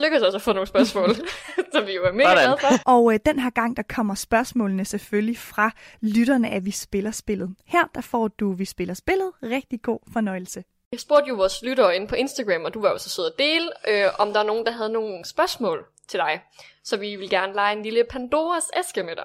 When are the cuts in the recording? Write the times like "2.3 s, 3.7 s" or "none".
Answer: 2.8 s